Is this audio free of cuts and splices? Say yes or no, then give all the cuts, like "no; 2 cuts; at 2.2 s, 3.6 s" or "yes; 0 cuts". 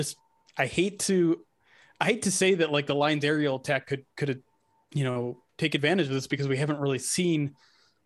yes; 0 cuts